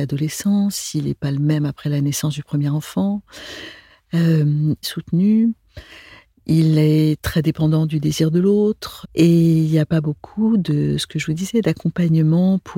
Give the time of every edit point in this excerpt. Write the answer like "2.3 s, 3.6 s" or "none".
4.8 s, 9.0 s